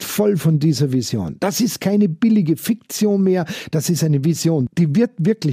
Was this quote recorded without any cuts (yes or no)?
yes